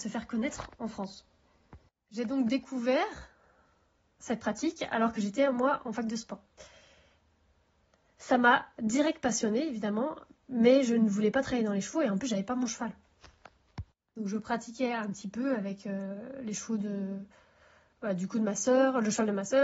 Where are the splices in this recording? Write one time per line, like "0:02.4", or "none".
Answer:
none